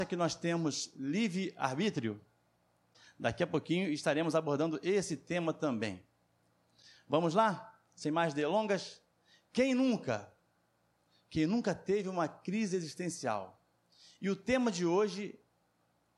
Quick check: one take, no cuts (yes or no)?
yes